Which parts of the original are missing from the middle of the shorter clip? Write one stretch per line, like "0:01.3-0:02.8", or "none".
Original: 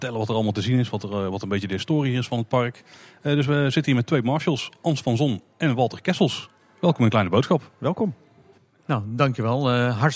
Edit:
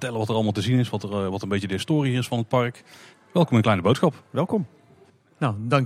0:03.1-0:06.6